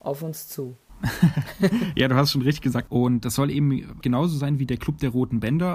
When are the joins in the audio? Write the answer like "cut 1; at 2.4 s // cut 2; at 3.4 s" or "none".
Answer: cut 1; at 2.9 s // cut 2; at 4.0 s